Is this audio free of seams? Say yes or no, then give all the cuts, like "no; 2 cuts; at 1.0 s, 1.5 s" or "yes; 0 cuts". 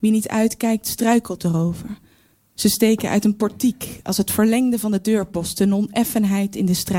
no; 1 cut; at 2.4 s